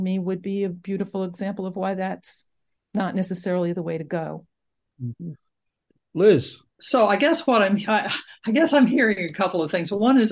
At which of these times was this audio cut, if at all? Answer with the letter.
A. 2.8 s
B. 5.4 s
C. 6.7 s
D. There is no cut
D